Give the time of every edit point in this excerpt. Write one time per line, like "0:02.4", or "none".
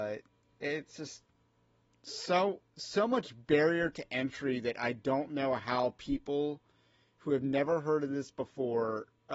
none